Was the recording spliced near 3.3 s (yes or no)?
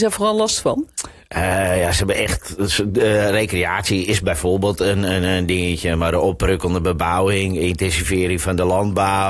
no